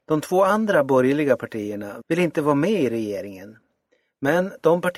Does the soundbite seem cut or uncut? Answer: cut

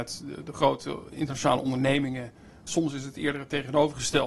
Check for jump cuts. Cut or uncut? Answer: cut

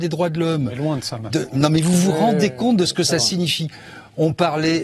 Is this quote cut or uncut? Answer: uncut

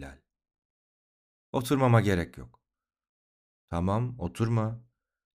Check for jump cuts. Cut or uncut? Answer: uncut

